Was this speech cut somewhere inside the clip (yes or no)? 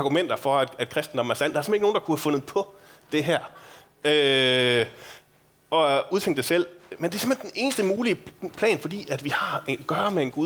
no